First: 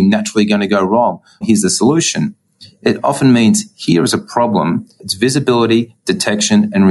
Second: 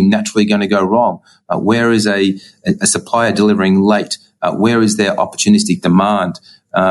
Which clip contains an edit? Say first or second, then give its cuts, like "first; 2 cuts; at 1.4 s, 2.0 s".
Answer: first; 2 cuts; at 1.4 s, 5.0 s